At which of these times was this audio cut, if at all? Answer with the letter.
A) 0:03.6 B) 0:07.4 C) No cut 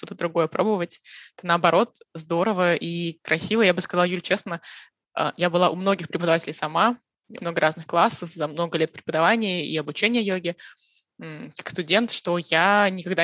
B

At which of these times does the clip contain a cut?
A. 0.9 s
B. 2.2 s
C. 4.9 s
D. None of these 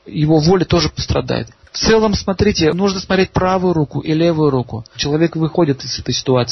C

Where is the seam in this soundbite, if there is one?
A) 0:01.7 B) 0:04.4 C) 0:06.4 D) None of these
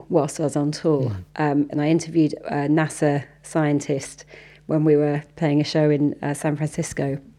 A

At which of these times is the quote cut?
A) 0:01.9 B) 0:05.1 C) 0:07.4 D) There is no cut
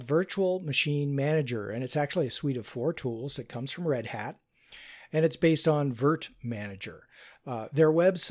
D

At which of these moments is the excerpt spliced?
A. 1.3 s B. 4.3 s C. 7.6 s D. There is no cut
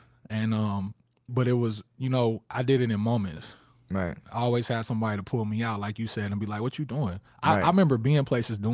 A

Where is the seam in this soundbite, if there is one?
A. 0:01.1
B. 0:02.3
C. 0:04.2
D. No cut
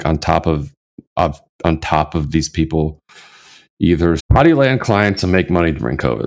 C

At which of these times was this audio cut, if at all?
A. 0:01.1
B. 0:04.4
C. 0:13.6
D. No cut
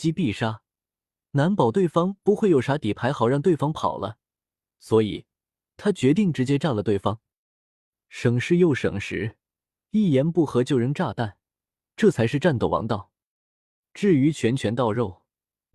D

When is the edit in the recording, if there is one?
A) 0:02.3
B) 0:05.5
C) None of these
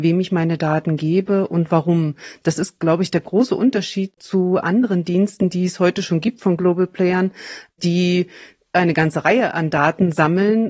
C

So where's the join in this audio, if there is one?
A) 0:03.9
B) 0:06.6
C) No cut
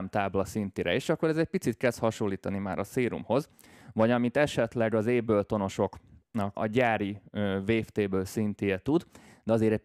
B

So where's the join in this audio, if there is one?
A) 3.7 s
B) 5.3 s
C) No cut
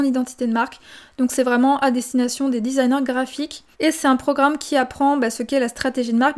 A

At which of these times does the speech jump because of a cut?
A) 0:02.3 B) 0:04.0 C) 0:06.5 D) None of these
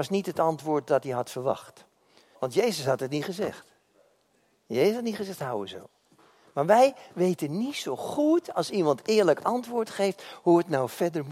A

